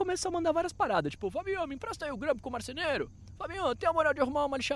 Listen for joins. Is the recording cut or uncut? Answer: uncut